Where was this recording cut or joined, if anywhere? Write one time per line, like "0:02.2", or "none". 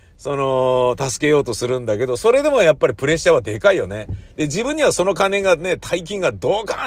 none